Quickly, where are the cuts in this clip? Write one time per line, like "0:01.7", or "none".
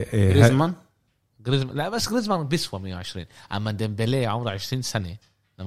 none